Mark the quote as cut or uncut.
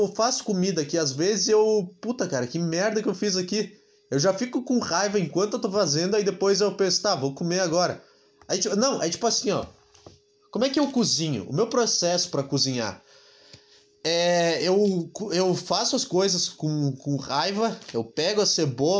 uncut